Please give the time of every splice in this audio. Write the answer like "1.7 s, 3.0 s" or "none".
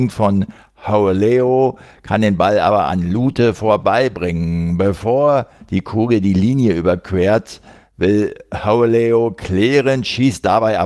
none